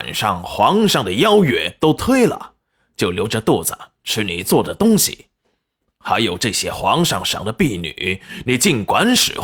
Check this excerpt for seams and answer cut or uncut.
uncut